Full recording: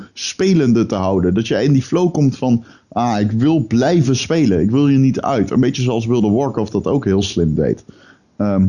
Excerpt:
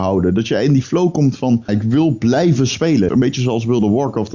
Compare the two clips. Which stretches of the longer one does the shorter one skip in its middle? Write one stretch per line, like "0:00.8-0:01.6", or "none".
0:02.7-0:03.2
0:04.6-0:05.5